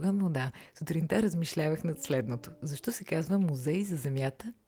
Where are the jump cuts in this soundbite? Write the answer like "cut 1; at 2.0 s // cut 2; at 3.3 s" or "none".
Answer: none